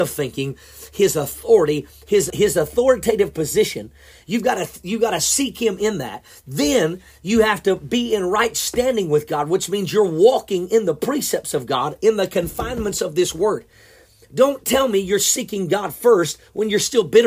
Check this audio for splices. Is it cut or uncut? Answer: cut